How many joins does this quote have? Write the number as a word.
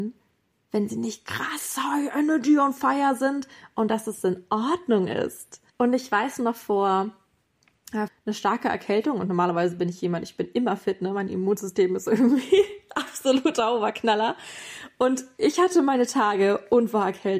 two